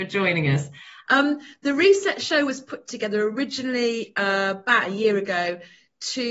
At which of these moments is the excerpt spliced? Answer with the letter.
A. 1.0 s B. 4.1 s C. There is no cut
A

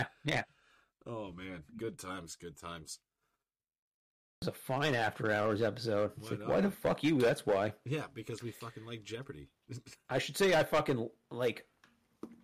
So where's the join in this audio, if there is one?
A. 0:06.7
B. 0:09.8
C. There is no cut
A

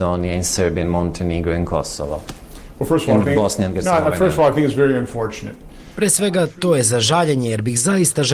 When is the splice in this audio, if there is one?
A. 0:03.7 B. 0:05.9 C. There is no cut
C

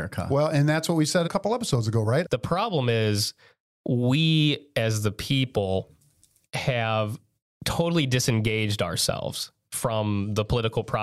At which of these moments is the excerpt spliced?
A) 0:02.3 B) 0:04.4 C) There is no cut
A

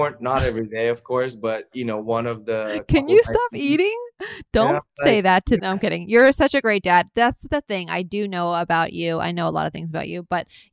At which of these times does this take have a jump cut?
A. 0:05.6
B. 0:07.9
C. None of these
A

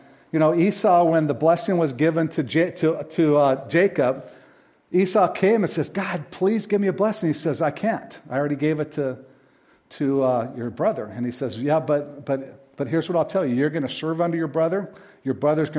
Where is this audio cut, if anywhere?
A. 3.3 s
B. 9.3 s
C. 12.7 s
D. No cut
D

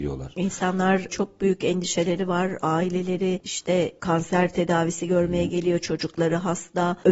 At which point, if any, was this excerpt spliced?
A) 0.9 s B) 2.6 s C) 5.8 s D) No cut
D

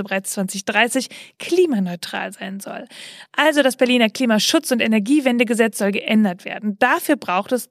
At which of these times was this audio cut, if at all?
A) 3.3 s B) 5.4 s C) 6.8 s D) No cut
D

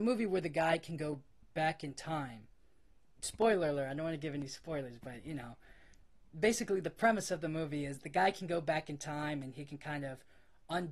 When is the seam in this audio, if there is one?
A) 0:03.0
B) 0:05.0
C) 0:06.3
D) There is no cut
D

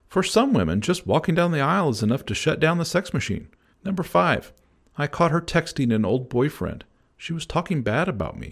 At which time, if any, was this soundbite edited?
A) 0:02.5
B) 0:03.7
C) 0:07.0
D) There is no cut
B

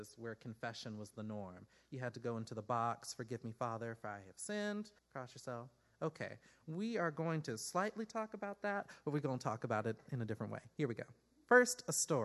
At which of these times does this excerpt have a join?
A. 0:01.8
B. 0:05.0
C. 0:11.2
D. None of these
B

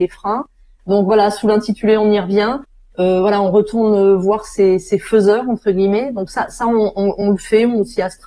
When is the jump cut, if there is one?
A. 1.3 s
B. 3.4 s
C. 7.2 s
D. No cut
D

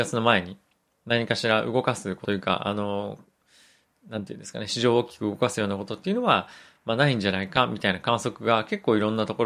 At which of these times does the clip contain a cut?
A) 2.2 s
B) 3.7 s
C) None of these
A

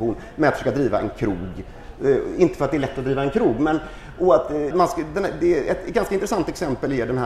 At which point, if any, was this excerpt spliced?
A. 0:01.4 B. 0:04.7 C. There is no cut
B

